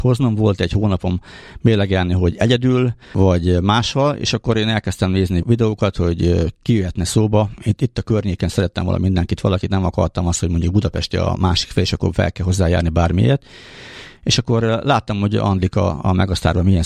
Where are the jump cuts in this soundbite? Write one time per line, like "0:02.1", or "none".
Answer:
0:03.0